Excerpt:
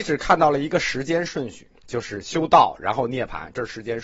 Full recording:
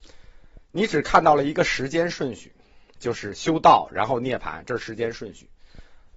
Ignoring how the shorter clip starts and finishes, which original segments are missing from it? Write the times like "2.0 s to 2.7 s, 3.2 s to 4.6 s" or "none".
2.6 s to 2.9 s